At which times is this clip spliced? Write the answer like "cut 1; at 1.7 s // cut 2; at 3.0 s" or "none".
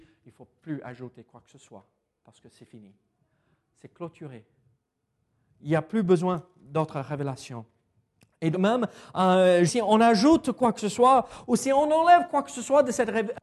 cut 1; at 8.5 s // cut 2; at 9.7 s